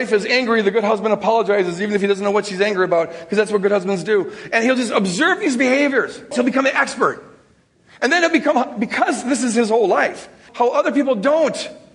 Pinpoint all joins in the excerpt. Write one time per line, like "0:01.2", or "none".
0:06.3
0:10.5